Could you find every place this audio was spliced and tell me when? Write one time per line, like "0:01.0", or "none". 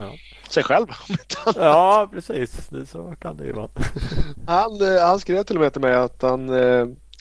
none